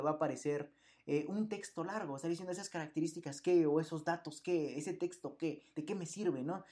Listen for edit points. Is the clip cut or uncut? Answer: uncut